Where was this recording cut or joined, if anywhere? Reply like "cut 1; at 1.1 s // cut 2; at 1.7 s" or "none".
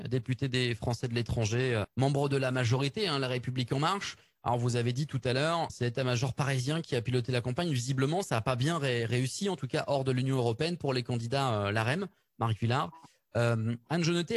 cut 1; at 1.8 s // cut 2; at 5.7 s